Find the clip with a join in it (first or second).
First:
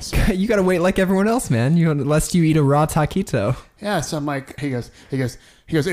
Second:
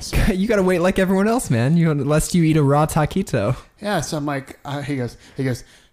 first